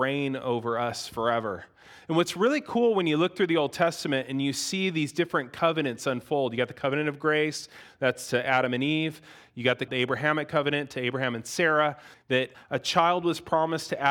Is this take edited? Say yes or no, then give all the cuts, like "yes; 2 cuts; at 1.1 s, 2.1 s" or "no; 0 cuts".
yes; 1 cut; at 12.1 s